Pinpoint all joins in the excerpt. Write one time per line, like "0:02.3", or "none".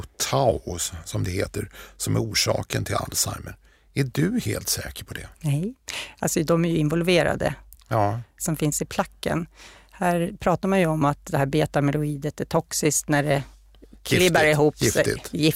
0:08.4